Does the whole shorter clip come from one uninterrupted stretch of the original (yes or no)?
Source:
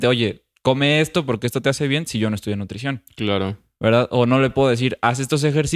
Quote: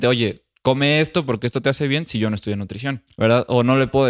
no